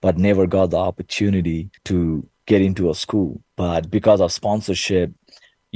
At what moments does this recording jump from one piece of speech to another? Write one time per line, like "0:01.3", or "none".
0:01.8